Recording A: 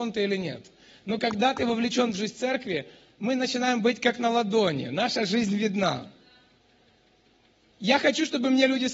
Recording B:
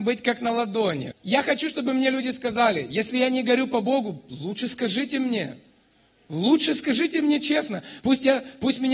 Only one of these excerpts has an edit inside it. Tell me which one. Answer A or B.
B